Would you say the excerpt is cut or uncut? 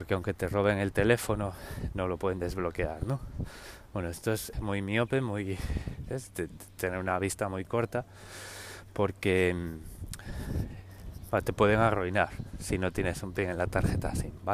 cut